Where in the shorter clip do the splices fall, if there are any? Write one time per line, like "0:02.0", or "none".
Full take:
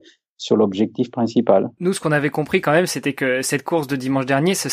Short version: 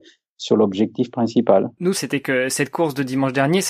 0:01.9